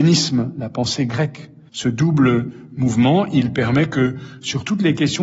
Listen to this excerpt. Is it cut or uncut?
cut